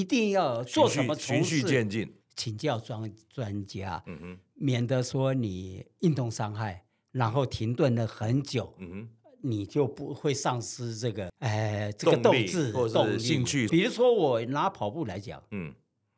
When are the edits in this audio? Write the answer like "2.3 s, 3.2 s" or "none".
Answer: 2.2 s, 13.7 s

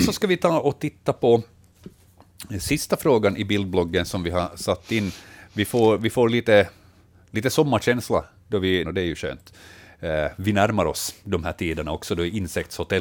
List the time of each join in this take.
8.8 s

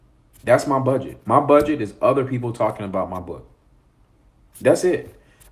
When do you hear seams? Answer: none

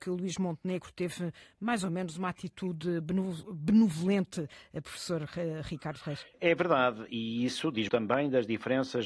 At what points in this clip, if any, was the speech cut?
6.3 s, 7.9 s

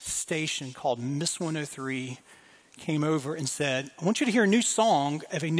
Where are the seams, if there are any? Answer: none

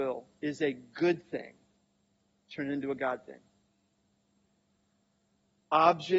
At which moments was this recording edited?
none

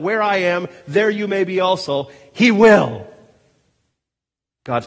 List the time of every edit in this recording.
none

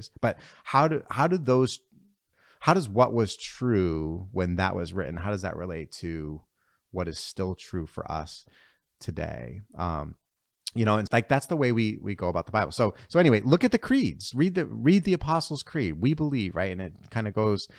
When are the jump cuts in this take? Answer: 11.1 s, 14.3 s

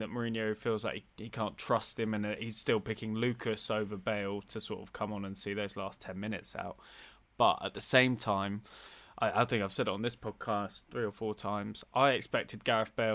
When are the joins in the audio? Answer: none

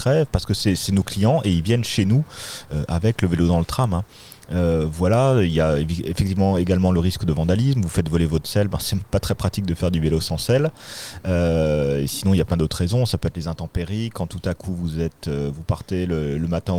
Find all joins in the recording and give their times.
none

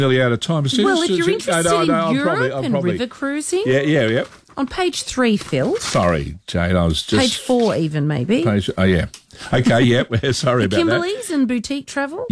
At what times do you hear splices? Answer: none

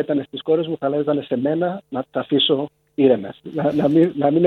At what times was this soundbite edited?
none

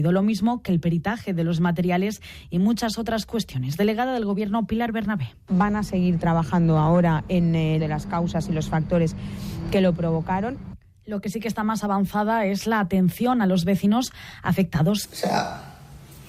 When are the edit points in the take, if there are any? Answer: 7.8 s, 15.0 s

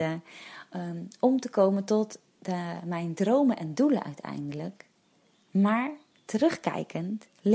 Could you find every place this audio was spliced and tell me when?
none

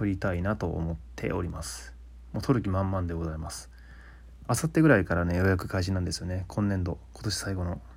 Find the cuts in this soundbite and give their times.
none

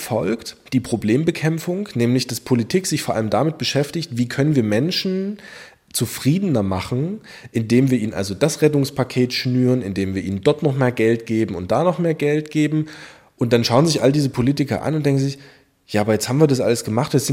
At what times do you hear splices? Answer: none

